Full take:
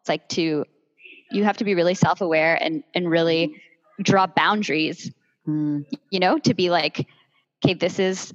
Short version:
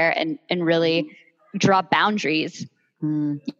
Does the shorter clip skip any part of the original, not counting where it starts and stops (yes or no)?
no